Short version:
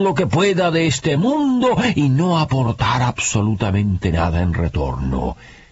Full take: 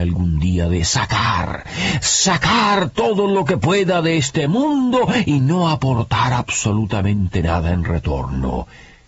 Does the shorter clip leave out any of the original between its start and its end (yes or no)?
no